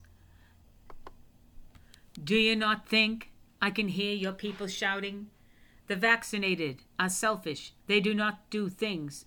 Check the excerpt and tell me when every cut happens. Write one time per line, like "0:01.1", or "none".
0:07.8